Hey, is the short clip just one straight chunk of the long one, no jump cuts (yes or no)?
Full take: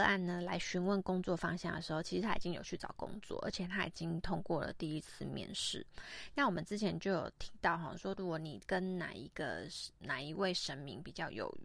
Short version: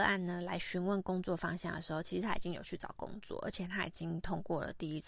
yes